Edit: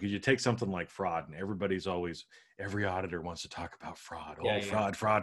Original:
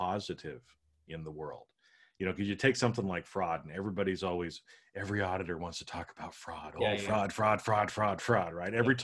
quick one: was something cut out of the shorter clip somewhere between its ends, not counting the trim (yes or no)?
no